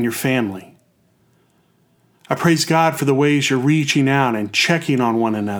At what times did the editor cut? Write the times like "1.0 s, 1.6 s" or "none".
none